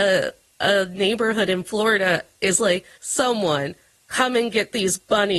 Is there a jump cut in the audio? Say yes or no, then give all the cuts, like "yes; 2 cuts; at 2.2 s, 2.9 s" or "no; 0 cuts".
yes; 1 cut; at 2.9 s